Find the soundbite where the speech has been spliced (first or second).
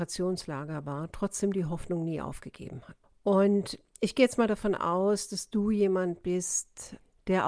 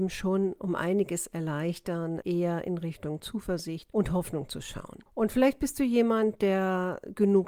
second